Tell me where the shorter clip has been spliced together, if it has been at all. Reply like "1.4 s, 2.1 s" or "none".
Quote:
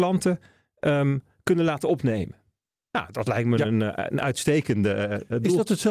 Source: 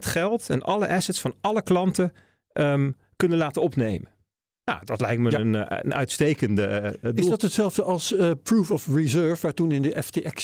none